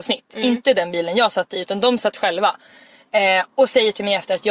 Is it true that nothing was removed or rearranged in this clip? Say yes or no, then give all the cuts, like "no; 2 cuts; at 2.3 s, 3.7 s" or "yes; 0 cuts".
yes; 0 cuts